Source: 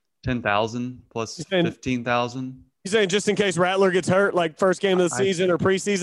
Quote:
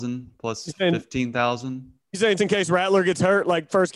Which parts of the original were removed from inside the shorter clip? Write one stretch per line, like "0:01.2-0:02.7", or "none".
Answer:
0:03.1-0:03.2